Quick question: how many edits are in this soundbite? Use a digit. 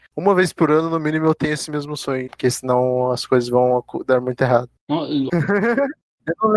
2